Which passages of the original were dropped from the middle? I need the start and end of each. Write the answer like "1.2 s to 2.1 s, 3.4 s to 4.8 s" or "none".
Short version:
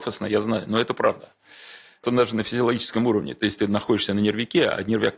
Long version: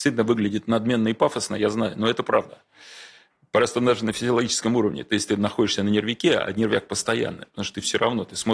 3.3 s to 3.7 s